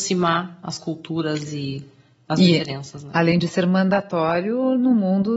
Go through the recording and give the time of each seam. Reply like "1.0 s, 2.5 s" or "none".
none